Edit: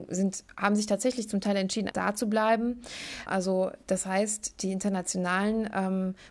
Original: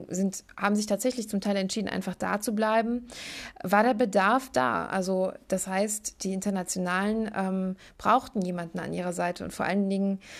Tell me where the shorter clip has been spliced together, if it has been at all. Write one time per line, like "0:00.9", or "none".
0:01.9
0:03.3

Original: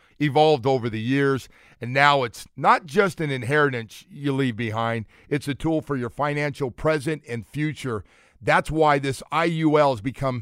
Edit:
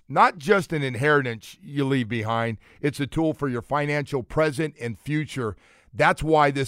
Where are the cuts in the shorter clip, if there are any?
none

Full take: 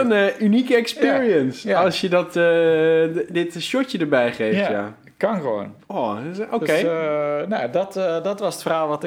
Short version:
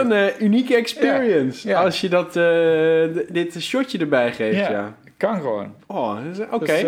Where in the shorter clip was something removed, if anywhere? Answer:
none

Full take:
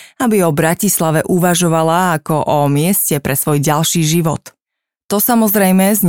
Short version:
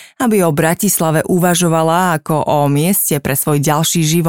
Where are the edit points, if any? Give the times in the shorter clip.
none

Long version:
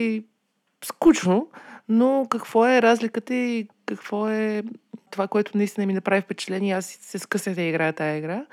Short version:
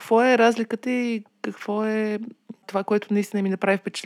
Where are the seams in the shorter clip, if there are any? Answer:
none

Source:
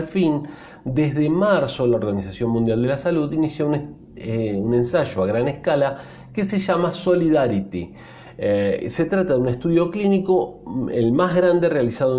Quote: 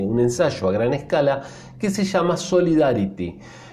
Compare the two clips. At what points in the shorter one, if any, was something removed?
none

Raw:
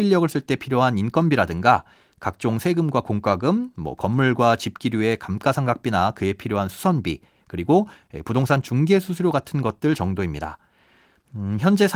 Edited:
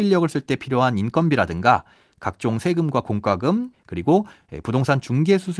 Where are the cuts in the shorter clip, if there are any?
0:03.7

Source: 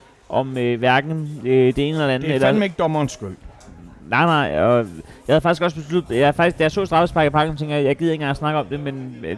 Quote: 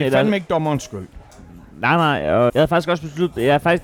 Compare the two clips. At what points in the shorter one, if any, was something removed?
0:02.5

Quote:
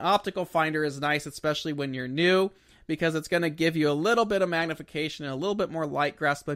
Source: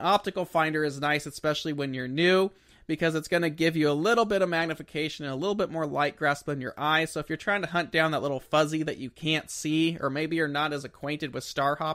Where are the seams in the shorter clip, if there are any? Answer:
none

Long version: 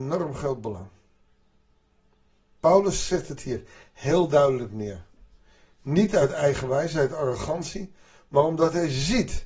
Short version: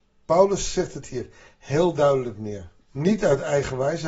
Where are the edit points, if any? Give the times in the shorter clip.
0:02.8

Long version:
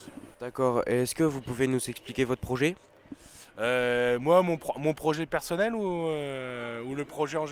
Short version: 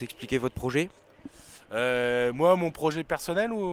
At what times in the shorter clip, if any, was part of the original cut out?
0:02.7

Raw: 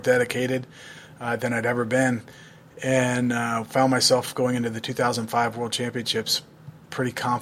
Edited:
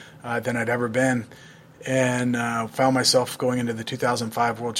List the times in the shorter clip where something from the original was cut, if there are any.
none

